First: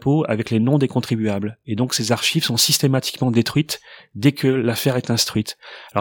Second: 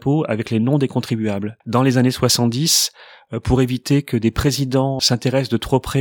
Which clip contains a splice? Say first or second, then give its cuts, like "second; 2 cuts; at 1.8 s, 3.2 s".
second; 2 cuts; at 1.6 s, 5.0 s